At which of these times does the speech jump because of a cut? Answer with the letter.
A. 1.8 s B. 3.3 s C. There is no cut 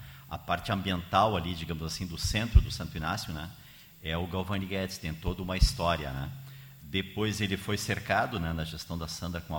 C